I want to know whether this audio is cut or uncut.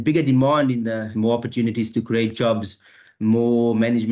cut